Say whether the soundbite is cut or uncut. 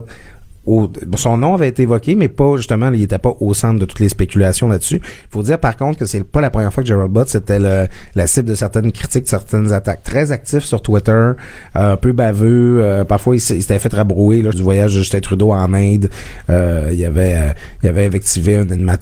cut